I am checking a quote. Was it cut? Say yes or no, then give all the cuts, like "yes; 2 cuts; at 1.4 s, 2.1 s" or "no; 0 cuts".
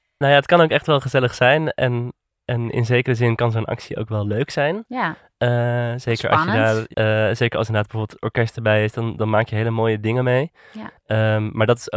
yes; 1 cut; at 6.9 s